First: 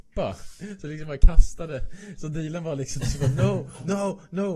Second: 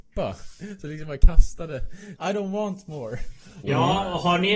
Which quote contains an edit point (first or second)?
second